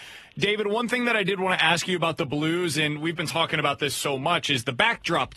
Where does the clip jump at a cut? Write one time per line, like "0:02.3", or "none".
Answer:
none